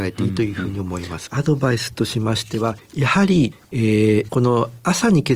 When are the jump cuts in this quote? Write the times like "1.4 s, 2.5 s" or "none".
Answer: 1.3 s

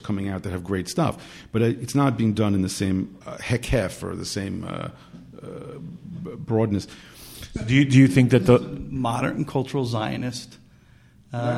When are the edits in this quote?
3.2 s

